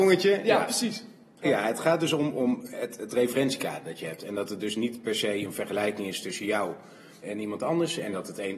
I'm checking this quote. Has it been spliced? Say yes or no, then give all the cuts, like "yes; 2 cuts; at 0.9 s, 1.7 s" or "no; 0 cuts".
yes; 2 cuts; at 1.4 s, 7.2 s